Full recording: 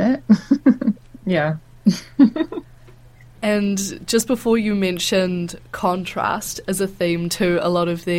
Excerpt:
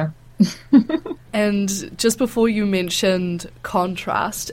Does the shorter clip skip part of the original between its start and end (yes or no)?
yes